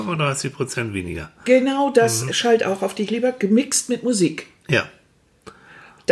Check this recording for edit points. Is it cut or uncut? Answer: uncut